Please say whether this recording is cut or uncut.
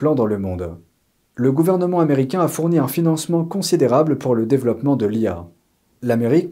uncut